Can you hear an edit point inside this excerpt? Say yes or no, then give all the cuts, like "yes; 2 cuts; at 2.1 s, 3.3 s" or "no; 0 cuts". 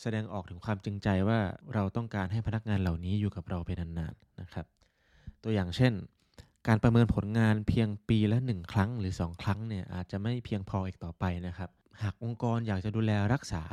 no; 0 cuts